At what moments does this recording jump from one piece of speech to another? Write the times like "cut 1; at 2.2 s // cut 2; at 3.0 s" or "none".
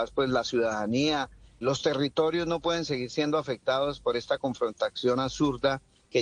cut 1; at 1.6 s